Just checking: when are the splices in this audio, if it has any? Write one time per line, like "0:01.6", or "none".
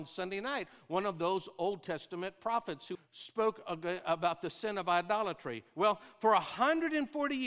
0:02.9